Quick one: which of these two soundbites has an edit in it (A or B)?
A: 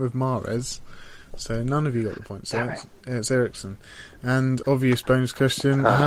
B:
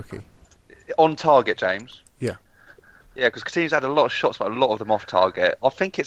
A